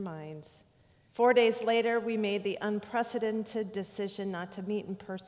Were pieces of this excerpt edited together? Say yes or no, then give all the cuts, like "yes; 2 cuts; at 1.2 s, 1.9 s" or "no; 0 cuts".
yes; 1 cut; at 1.1 s